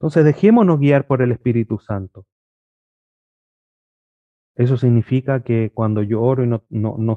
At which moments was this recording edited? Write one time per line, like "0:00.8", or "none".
none